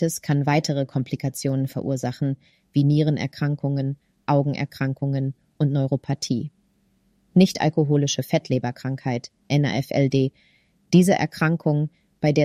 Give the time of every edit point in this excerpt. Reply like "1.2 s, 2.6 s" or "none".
none

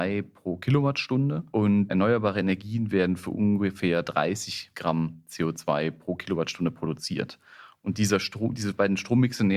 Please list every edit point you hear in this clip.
none

